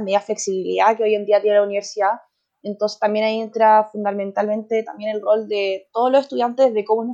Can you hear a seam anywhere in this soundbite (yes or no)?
no